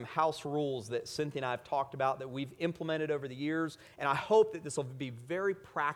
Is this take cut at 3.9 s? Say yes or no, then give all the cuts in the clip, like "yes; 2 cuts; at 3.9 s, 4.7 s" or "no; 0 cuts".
yes; 1 cut; at 3.9 s